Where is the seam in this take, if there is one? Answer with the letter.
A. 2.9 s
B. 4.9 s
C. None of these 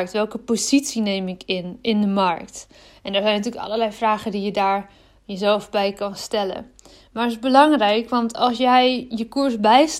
C